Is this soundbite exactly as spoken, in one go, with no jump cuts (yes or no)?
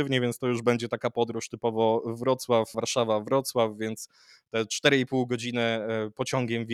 no